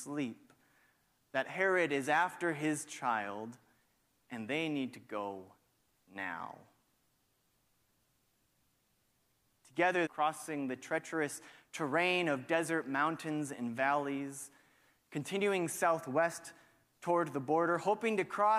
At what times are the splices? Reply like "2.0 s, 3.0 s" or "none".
10.1 s